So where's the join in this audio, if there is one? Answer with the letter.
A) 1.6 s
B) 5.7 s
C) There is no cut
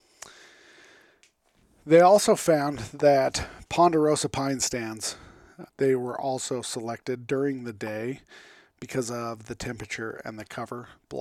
B